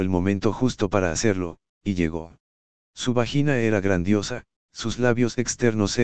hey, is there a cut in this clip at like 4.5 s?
no; 1 cut; at 2.8 s

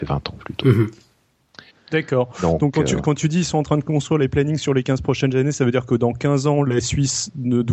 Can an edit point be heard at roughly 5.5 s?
no; 1 cut; at 1.7 s

